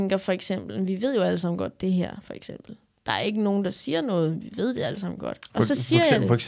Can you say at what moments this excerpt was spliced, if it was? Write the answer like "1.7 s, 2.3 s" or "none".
none